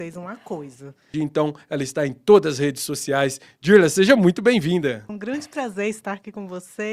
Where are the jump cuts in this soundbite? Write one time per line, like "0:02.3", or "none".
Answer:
0:01.1
0:05.1